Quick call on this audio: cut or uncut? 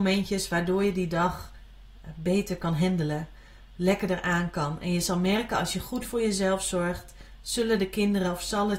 uncut